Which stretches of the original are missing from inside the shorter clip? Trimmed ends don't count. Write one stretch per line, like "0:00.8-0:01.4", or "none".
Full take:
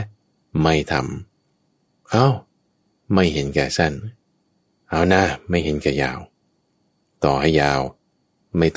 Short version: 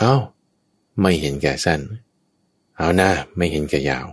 none